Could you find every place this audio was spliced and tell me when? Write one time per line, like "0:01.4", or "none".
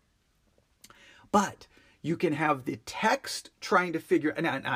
none